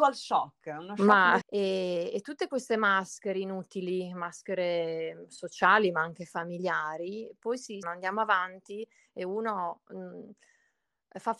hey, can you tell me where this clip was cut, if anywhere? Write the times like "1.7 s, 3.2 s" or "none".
1.4 s, 7.8 s